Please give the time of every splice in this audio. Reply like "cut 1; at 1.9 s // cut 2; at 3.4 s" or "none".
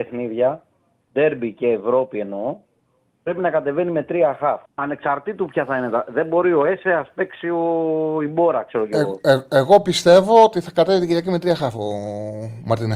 cut 1; at 4.7 s